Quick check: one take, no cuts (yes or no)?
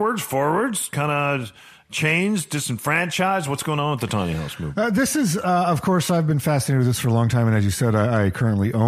yes